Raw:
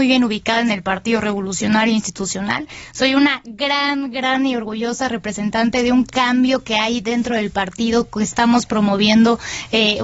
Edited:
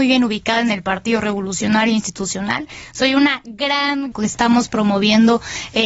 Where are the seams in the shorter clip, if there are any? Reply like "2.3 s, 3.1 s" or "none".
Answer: 4.1 s

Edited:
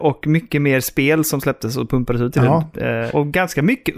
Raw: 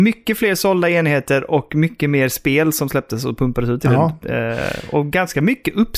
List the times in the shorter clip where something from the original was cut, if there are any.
3.1 s

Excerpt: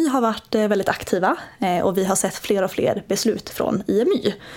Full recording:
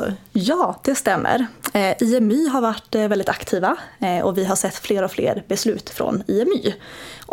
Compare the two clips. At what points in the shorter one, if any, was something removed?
none

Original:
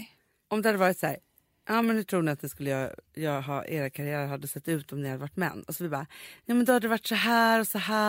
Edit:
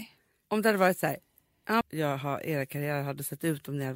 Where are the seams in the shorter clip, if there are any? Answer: 1.8 s

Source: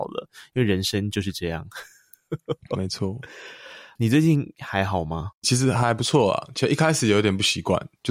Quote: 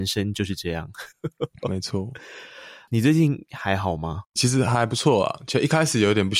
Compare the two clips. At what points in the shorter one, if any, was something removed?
1.1 s

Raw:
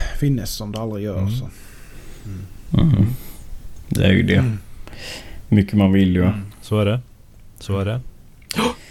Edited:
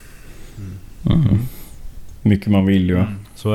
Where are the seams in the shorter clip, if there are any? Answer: 2.2 s

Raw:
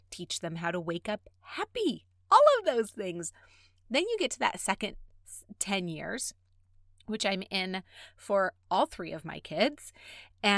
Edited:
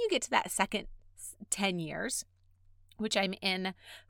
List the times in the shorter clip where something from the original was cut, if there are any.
none

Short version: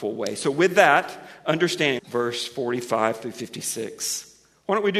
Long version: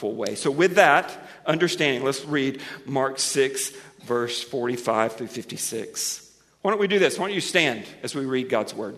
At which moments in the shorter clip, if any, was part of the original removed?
2.0 s

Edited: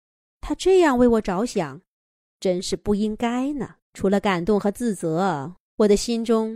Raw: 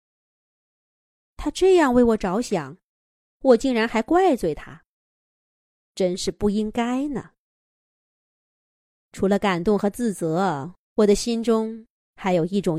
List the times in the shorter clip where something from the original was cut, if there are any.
2.2 s, 3.8 s

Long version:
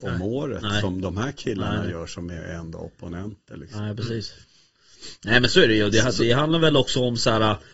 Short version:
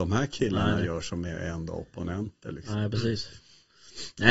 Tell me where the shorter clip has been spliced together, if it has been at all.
none

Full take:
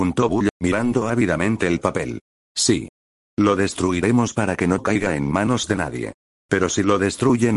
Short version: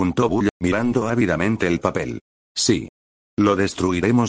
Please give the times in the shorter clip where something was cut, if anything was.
none

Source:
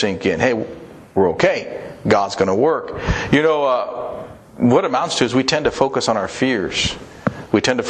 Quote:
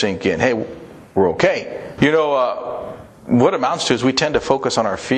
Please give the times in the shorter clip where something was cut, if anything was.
2.0 s

